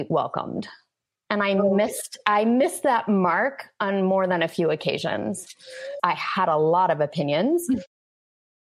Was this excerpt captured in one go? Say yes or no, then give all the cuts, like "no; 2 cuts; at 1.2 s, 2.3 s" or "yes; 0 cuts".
no; 1 cut; at 6.0 s